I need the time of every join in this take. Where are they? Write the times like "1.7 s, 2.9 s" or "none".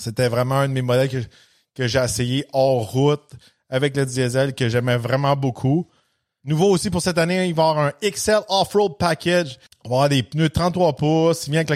9.7 s